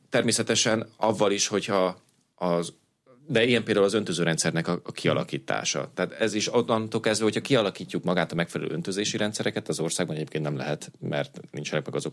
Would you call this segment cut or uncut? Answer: uncut